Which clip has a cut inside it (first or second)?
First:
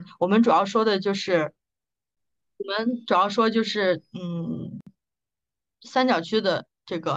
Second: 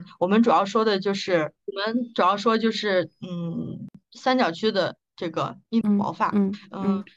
second